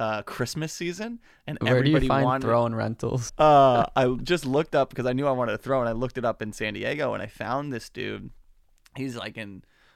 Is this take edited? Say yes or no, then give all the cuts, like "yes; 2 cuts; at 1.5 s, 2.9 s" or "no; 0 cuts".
yes; 1 cut; at 3.3 s